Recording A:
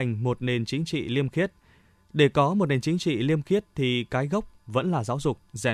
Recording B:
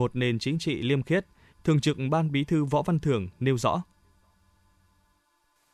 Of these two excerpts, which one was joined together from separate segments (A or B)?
B